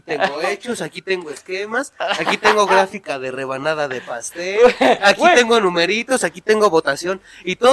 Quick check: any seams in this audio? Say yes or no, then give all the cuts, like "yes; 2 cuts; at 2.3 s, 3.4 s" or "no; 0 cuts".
no; 0 cuts